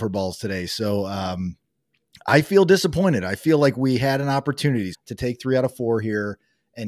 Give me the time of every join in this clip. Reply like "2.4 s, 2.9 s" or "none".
4.9 s